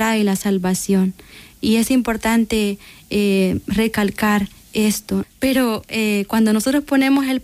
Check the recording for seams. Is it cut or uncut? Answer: cut